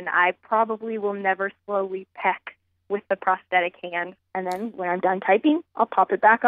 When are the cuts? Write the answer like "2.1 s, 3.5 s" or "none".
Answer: 4.2 s